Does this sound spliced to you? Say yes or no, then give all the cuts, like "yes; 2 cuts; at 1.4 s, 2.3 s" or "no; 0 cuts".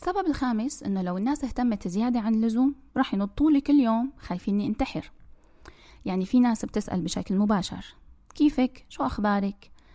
no; 0 cuts